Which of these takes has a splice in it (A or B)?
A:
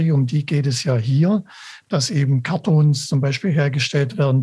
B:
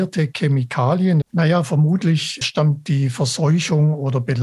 B